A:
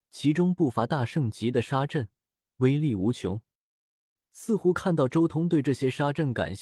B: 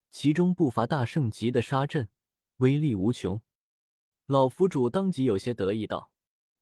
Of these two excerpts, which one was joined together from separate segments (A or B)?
B